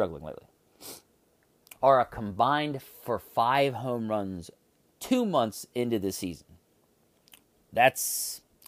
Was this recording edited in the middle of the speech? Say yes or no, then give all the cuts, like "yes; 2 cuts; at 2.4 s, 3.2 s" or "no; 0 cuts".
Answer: yes; 1 cut; at 1.8 s